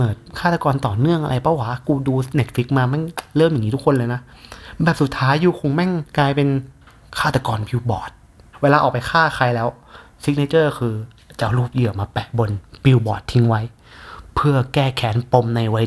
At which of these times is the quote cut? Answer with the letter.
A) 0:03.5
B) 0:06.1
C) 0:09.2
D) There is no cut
B